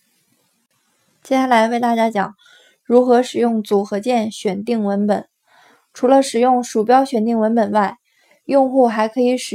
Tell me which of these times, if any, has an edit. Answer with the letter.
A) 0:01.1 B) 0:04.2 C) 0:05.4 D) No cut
D